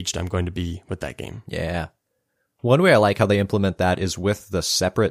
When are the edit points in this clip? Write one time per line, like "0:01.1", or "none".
none